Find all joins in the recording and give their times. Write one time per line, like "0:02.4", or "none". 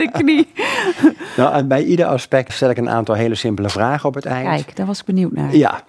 0:02.5